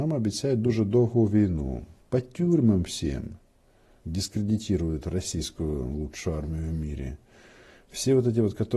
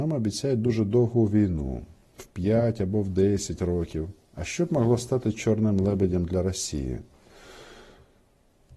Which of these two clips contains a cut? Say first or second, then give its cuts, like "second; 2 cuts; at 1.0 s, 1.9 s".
first; 2 cuts; at 2.0 s, 4.0 s